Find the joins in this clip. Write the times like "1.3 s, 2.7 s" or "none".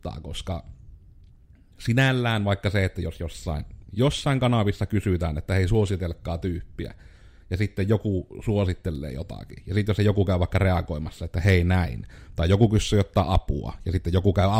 none